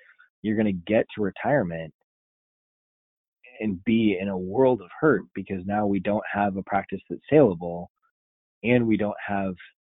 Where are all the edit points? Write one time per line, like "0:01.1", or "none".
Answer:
none